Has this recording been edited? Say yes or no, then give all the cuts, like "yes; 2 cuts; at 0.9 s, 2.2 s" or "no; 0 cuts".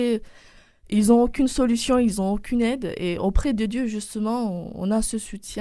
no; 0 cuts